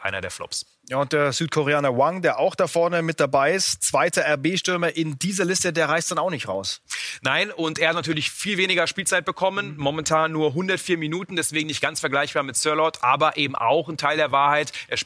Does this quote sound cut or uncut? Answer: uncut